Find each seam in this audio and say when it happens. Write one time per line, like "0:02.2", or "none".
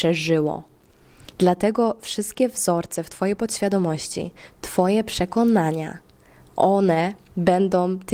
0:01.3